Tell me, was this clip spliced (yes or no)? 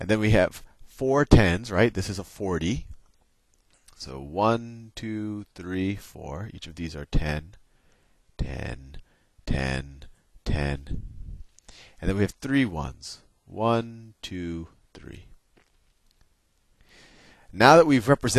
no